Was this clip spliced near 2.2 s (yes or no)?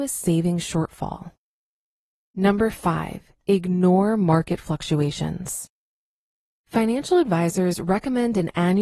no